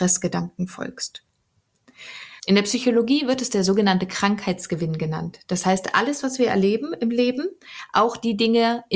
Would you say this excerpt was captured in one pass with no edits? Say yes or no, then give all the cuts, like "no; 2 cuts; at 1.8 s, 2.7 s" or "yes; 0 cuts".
no; 1 cut; at 2.4 s